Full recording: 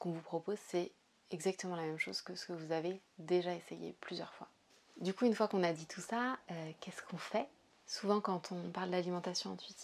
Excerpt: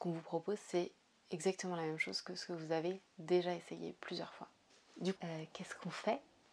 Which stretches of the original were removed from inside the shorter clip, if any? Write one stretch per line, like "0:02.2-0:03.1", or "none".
0:05.2-0:06.4